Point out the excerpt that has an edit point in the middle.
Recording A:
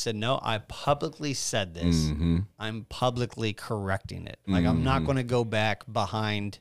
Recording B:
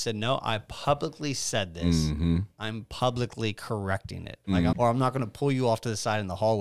B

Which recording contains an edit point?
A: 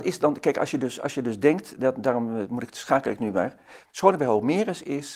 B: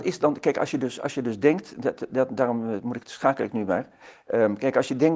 A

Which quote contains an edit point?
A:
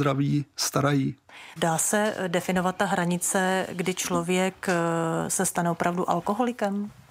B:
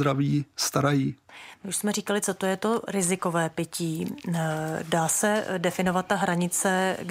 A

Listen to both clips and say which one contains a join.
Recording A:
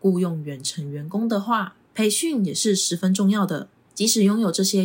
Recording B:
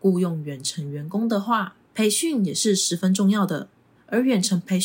A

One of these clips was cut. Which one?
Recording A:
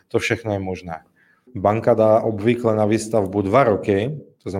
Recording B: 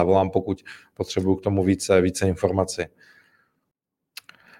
A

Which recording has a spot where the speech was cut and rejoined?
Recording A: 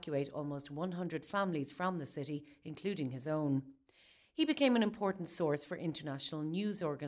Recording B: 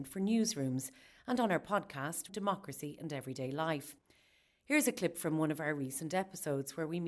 B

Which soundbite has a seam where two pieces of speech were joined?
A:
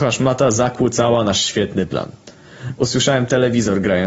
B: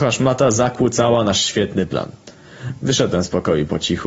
A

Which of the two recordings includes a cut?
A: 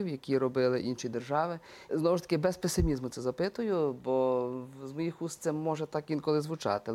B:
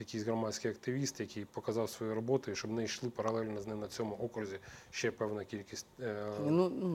A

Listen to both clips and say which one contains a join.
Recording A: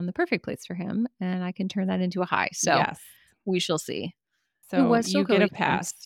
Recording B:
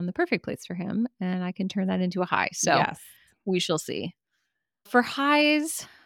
A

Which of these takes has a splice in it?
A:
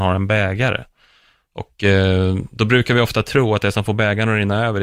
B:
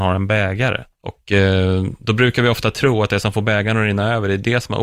B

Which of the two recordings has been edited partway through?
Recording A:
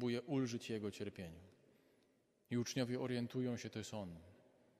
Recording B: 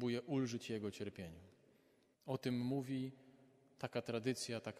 B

